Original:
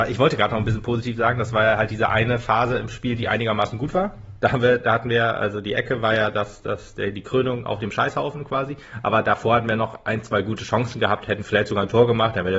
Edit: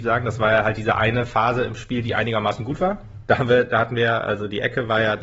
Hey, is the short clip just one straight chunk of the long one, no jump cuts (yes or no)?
yes